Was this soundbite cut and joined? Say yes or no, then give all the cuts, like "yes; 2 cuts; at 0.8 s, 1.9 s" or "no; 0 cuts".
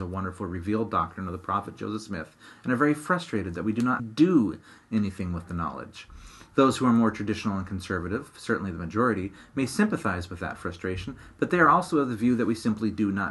yes; 1 cut; at 4.0 s